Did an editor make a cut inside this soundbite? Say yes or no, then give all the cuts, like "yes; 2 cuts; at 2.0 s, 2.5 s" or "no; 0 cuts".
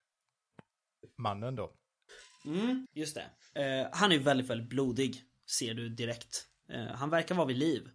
yes; 1 cut; at 2.9 s